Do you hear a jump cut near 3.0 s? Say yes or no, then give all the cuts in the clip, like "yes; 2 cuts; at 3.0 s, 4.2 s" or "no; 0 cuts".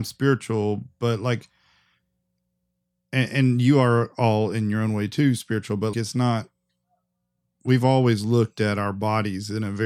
no; 1 cut; at 5.9 s